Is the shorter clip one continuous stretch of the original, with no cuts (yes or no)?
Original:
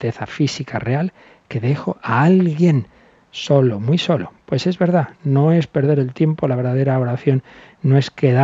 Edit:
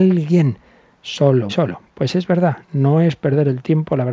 no